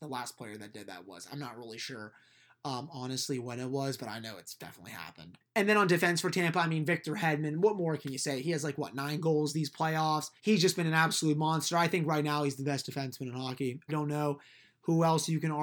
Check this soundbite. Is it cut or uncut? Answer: cut